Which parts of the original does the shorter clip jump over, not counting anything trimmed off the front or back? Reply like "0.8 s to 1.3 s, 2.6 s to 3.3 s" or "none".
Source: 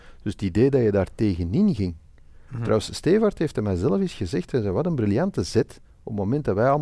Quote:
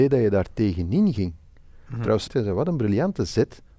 2.9 s to 4.5 s